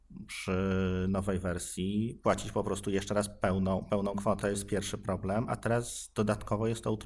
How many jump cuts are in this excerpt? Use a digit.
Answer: 1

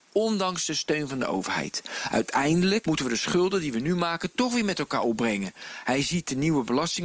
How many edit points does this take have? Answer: 1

